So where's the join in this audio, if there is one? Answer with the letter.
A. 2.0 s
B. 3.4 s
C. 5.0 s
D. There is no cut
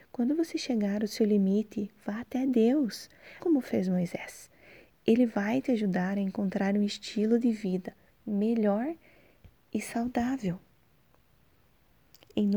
B